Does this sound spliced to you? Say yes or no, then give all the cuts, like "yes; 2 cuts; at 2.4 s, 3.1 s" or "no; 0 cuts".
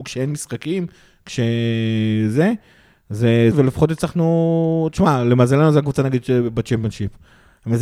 yes; 1 cut; at 3.5 s